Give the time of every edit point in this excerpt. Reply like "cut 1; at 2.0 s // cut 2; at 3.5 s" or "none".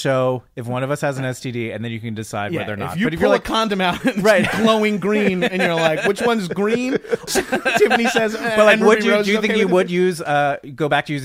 cut 1; at 7.3 s